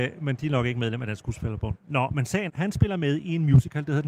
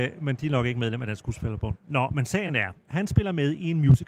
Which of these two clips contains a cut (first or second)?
first